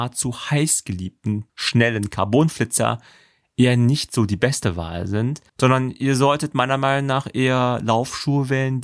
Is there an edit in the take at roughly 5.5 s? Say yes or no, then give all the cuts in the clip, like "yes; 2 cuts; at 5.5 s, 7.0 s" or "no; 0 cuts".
yes; 2 cuts; at 1.5 s, 5.5 s